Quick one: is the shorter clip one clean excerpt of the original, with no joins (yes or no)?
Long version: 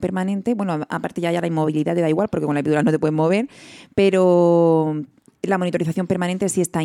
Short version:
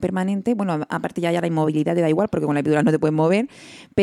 yes